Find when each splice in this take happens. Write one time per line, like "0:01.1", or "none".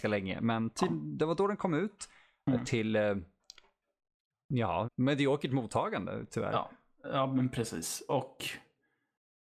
0:04.8